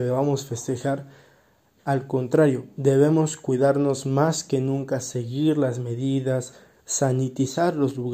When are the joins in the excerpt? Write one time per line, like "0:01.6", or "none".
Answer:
none